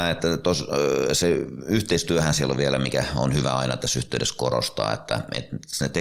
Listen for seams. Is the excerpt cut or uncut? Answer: uncut